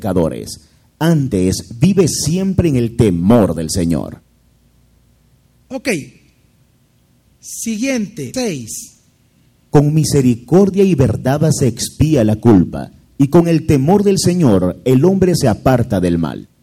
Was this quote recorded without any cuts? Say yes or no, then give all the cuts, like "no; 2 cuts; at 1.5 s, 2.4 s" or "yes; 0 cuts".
no; 2 cuts; at 5.7 s, 8.3 s